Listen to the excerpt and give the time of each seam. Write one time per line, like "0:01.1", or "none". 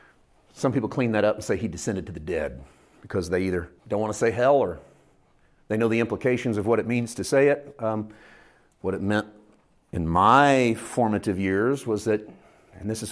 0:03.8